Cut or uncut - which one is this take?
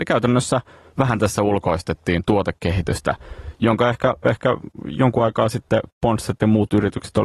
uncut